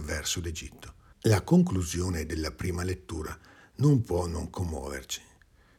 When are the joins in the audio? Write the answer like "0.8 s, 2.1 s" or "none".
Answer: 1.1 s

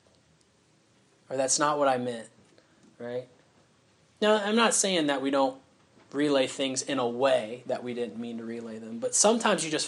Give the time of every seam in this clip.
none

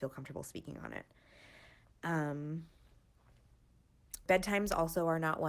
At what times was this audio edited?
4.3 s

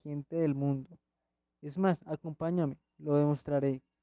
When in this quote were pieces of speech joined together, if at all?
none

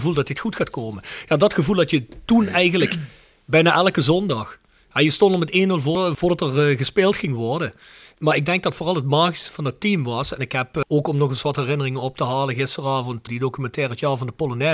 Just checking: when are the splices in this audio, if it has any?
none

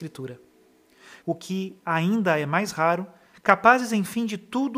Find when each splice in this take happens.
1.2 s, 3.3 s

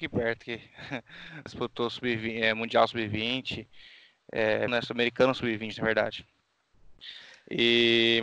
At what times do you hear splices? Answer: 1.5 s, 4.7 s

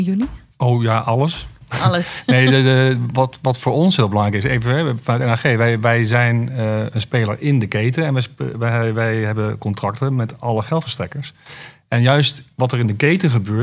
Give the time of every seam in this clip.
none

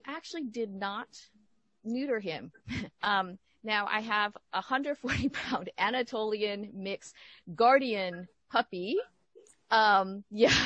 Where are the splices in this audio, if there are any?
2.9 s

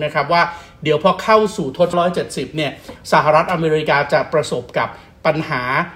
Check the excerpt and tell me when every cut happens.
1.9 s

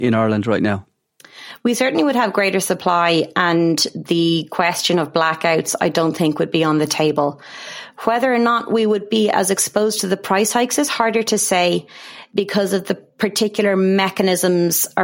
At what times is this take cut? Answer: none

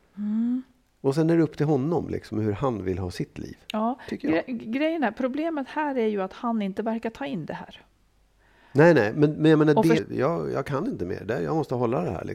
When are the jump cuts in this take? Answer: 10.0 s

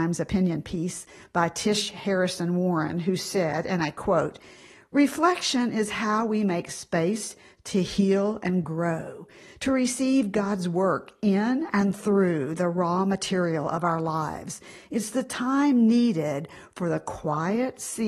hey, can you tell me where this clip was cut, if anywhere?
none

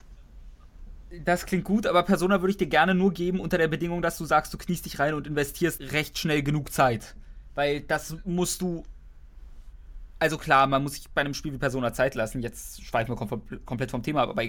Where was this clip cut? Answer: 5.8 s

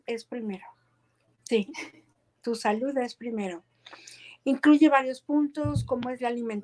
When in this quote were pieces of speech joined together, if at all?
1.2 s

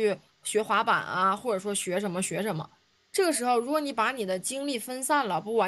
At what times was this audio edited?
none

